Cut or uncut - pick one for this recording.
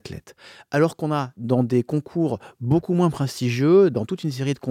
uncut